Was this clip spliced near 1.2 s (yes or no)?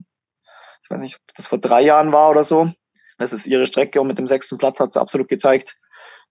no